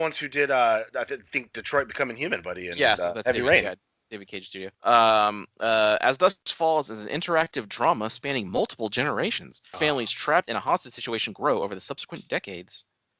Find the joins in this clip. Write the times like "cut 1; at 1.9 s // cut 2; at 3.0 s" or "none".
cut 1; at 4.7 s // cut 2; at 9.7 s